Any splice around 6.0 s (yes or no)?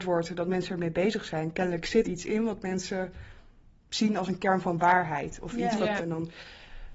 yes